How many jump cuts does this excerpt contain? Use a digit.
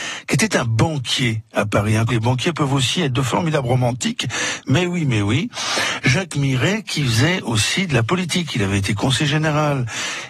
1